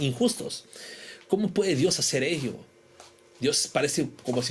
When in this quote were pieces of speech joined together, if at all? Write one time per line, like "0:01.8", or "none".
none

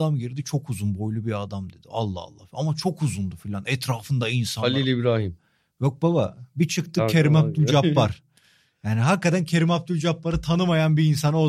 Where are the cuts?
none

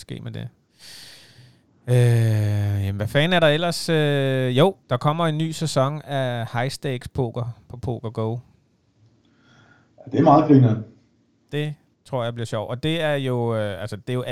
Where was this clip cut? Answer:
0:04.8

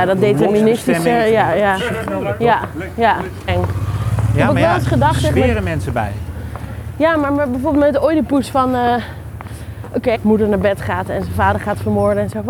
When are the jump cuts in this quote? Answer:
0:03.5
0:10.1

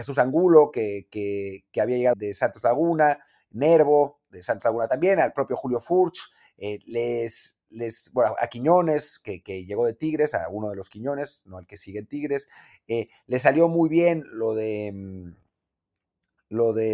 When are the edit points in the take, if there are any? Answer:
0:02.1

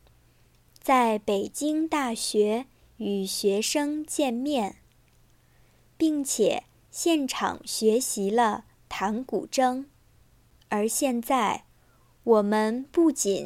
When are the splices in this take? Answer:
0:10.6

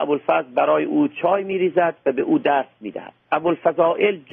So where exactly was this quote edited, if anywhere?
0:03.2

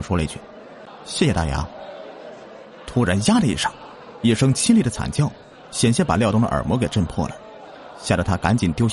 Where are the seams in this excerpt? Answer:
none

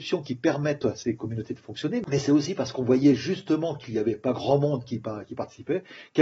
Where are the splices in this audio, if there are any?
none

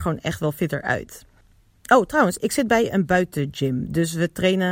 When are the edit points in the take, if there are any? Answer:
none

